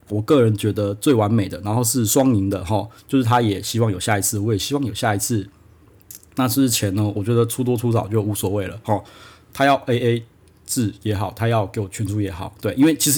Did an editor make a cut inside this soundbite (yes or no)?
no